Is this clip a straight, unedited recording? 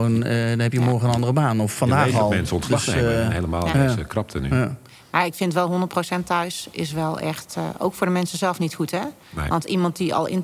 yes; 0 cuts

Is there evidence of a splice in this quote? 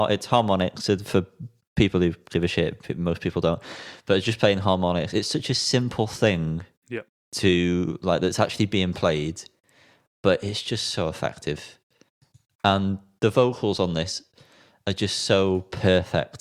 no; 0 cuts

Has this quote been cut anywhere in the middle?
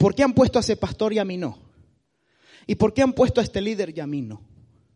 no; 0 cuts

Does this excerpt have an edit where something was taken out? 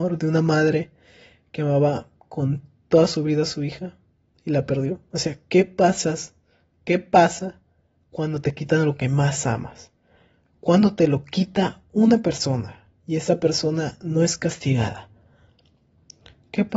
no; 0 cuts

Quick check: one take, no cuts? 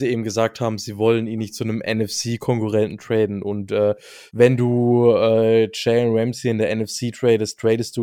no; 1 cut; at 4.3 s

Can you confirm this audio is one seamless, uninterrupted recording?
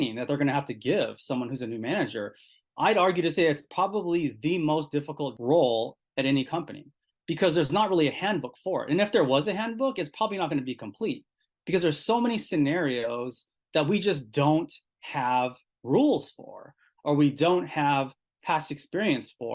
yes; 0 cuts

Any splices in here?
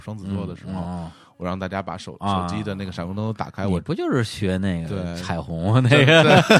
no; 0 cuts

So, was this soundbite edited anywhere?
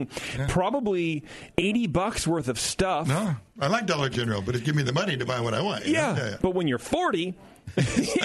yes; 1 cut; at 6.4 s

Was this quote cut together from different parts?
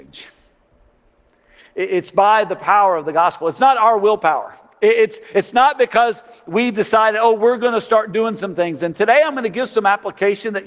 no; 0 cuts

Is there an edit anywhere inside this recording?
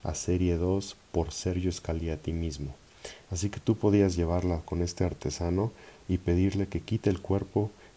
yes; 1 cut; at 3.2 s

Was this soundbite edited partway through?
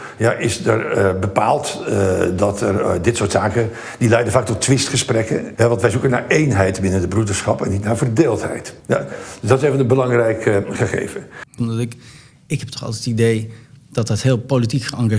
yes; 3 cuts; at 5.5 s, 8.8 s, 11.6 s

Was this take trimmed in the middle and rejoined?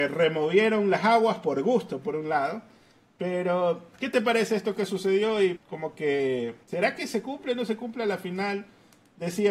yes; 2 cuts; at 5.6 s, 6.6 s

